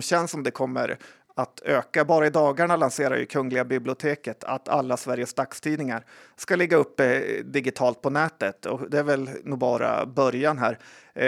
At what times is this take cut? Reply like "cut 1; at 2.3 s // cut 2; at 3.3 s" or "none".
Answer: none